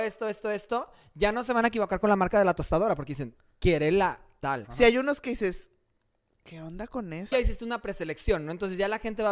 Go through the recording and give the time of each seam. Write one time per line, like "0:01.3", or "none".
0:04.6
0:07.3